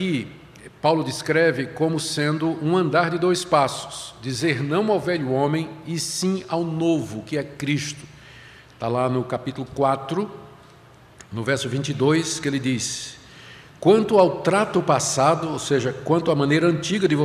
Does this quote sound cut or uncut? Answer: uncut